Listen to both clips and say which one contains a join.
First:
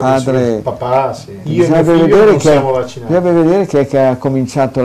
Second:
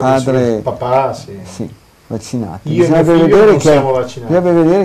first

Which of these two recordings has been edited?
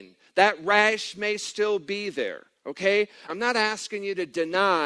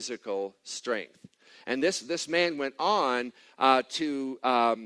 first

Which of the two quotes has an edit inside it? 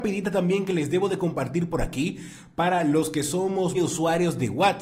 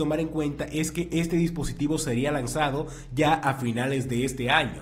first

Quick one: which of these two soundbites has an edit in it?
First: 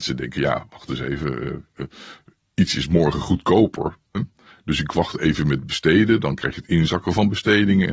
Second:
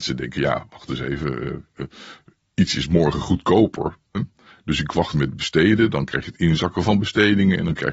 second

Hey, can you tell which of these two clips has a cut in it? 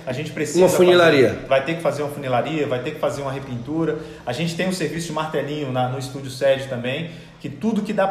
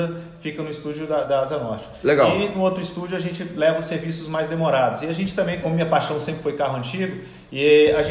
second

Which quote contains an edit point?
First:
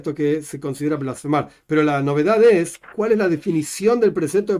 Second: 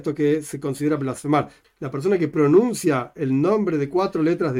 second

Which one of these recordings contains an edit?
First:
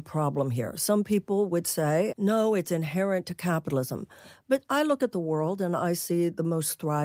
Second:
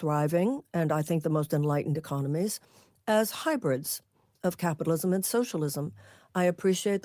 first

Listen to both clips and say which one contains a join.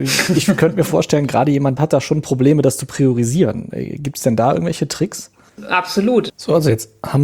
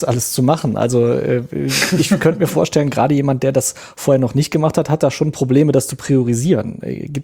first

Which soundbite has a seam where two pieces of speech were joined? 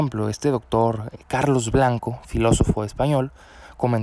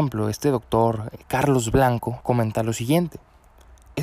second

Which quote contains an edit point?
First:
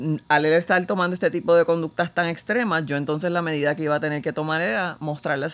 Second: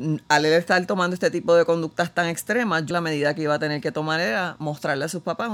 second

